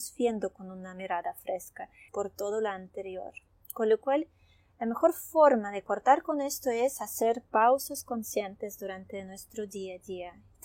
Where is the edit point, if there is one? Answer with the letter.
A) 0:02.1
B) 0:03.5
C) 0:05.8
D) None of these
A